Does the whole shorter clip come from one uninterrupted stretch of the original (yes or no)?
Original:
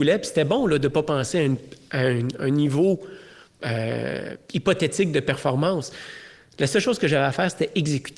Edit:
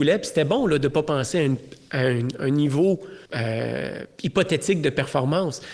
no